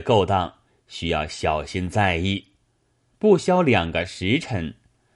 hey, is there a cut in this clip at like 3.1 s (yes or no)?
yes